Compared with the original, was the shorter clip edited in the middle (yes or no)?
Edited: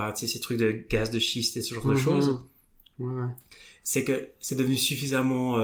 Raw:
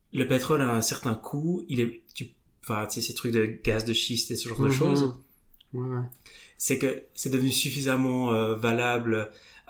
no